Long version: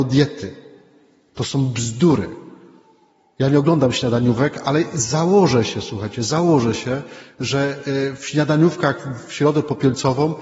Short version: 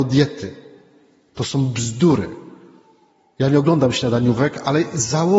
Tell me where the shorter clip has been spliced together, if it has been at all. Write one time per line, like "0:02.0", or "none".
none